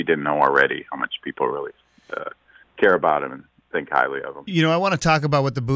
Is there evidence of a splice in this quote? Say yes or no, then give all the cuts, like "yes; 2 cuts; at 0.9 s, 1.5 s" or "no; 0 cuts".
no; 0 cuts